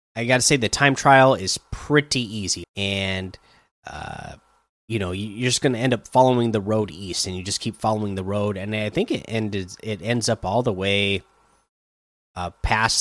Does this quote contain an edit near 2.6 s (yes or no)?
yes